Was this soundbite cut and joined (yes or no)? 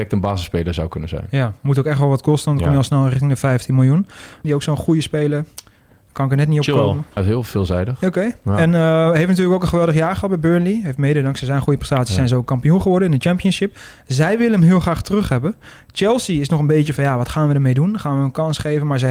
yes